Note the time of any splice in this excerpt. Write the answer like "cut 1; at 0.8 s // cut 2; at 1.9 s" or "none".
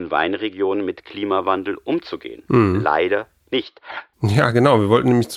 cut 1; at 4.1 s